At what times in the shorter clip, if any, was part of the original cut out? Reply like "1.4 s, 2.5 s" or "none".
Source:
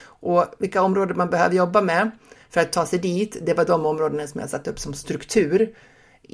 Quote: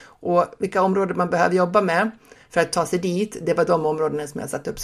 none